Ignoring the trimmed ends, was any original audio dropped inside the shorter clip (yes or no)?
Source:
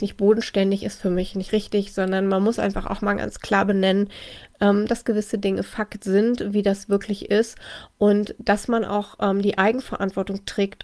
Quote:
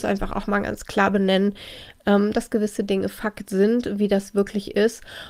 no